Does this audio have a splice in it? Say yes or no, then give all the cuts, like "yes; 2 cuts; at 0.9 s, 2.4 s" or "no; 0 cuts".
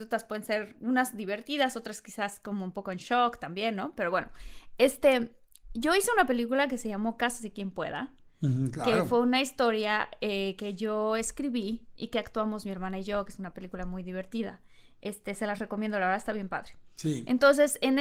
no; 0 cuts